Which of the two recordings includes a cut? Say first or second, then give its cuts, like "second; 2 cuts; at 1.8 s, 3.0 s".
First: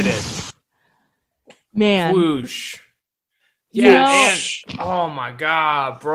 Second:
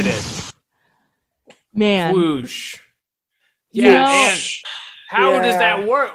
second; 1 cut; at 4.6 s